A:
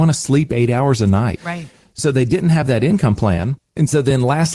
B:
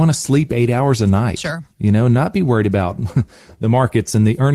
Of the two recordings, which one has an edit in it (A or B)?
A